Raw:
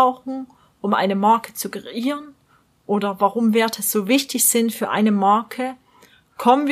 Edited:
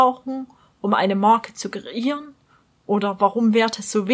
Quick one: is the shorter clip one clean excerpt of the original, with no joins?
yes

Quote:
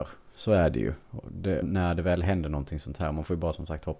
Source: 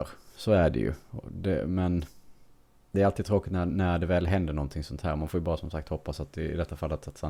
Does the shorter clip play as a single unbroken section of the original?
no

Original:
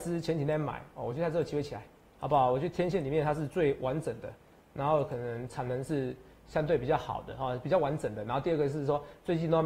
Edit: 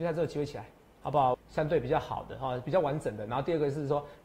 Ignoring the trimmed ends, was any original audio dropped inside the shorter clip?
yes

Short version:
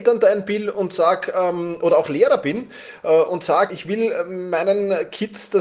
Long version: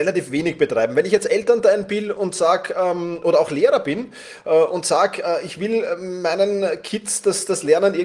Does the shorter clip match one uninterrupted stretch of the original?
no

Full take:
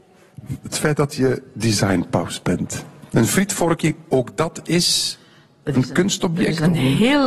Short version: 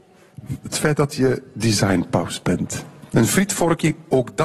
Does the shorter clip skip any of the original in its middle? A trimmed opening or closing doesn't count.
no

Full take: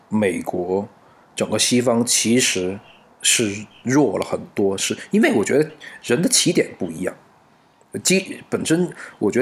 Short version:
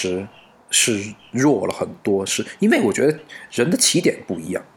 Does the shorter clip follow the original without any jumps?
yes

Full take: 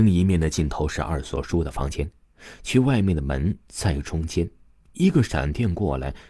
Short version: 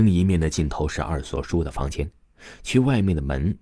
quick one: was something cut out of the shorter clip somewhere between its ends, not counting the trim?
no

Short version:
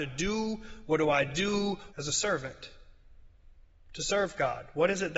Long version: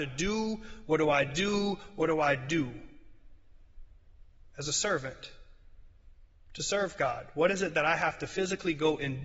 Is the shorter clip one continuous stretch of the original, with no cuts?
no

